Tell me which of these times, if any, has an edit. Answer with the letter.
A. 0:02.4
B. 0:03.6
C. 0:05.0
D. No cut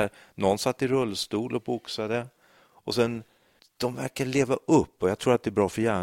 B